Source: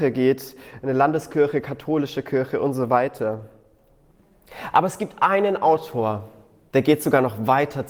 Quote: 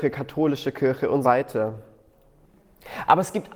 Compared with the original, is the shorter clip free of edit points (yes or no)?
no